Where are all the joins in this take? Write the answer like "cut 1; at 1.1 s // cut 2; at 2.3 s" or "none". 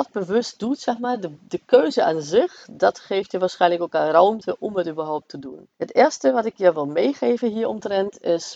cut 1; at 5.7 s